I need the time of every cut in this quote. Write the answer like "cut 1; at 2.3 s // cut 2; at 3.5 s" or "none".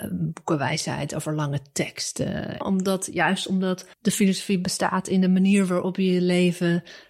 cut 1; at 2.6 s // cut 2; at 3.9 s